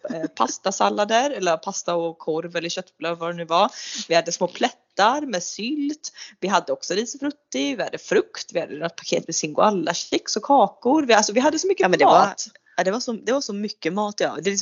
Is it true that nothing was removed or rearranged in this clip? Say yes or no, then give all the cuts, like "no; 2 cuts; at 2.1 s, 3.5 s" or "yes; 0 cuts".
yes; 0 cuts